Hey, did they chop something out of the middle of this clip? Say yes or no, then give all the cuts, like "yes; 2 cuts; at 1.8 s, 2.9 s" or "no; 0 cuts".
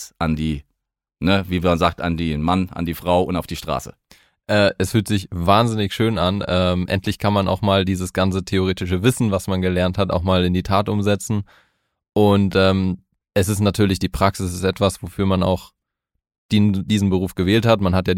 no; 0 cuts